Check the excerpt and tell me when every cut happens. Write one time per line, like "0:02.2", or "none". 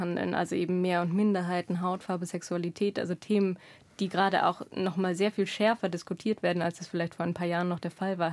none

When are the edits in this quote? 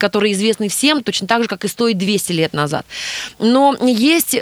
none

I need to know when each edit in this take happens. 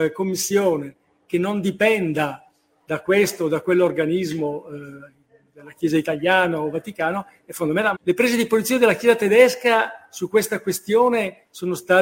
0:07.9

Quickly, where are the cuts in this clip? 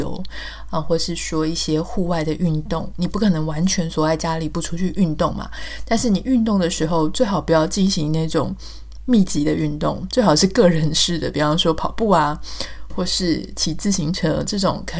none

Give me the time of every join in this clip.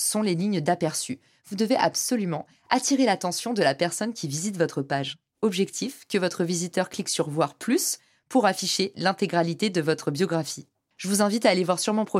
none

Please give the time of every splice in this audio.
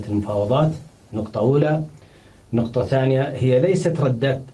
none

